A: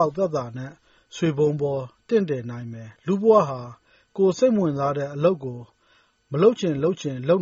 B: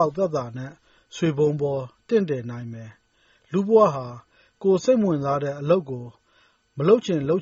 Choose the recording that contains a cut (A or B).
A